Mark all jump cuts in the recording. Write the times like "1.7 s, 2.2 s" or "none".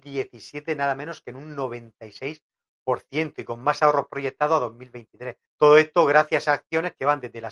5.4 s